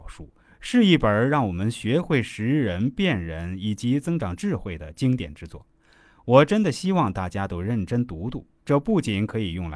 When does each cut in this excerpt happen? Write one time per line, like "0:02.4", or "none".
none